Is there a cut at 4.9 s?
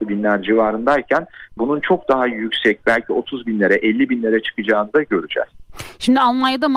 no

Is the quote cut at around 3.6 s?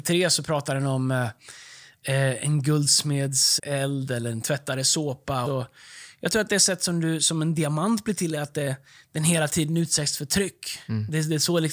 yes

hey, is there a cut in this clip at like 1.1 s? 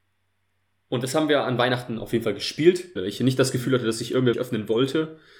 no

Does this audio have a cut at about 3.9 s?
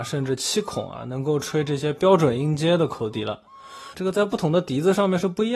yes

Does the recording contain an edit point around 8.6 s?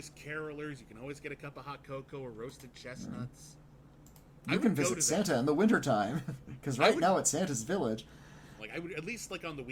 yes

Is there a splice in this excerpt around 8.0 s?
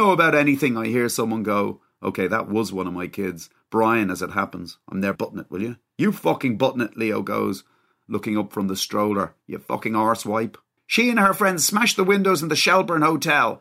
no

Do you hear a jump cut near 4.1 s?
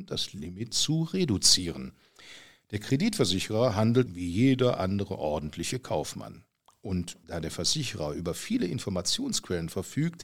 yes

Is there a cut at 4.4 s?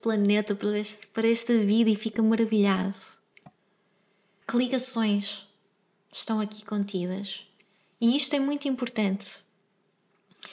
yes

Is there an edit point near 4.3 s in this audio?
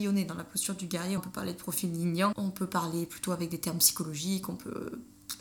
no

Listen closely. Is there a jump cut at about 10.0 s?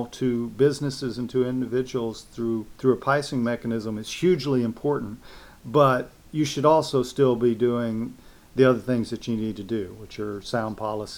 no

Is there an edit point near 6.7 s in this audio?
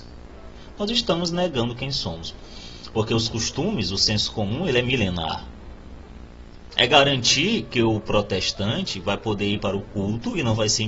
yes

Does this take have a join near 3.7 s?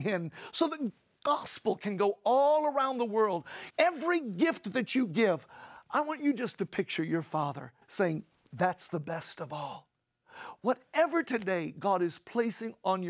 yes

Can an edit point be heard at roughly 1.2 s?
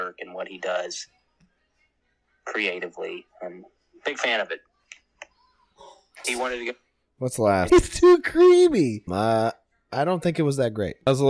no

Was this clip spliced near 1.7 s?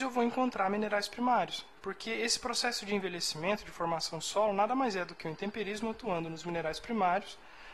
no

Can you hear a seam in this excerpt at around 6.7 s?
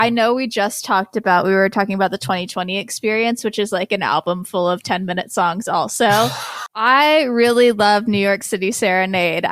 yes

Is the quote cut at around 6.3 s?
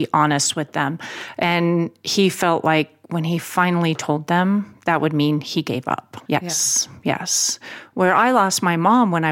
yes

